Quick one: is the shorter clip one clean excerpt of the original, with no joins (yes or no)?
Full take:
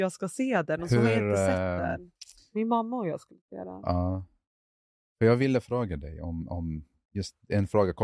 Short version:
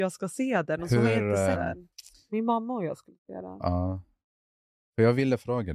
no